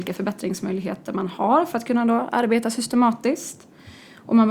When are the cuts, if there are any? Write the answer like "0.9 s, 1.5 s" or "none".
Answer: none

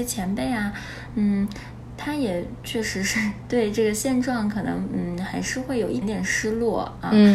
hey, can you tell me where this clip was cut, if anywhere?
6.0 s

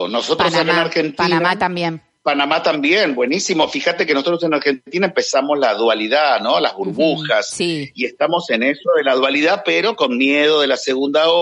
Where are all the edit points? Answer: none

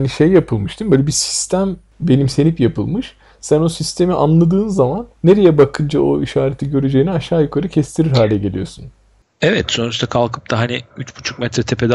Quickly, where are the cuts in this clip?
5.1 s

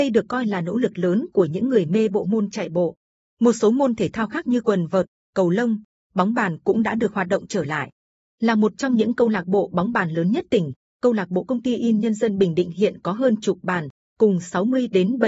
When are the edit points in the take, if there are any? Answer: none

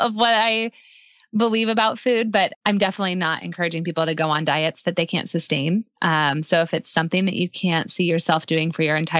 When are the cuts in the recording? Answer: 2.5 s

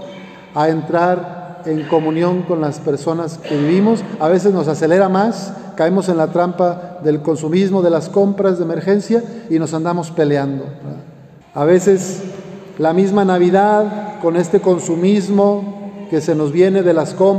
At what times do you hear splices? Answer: 11.4 s

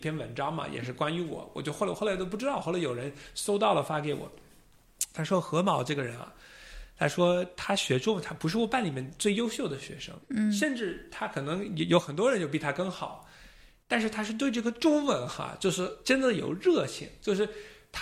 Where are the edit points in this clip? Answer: none

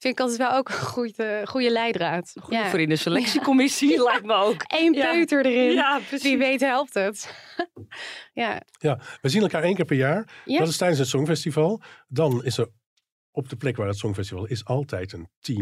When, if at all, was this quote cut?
none

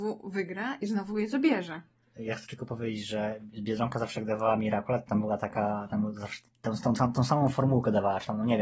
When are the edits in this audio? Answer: none

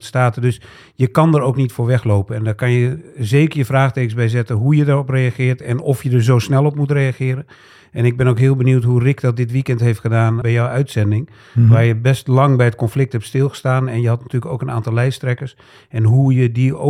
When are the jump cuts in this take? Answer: 10.4 s

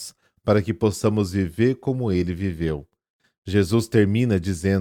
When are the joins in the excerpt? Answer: none

